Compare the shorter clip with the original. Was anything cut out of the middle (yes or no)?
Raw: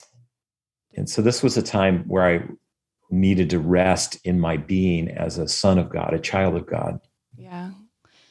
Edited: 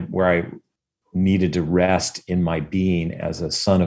no